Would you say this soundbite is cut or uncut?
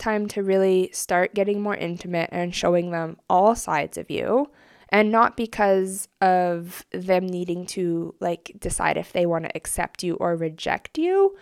uncut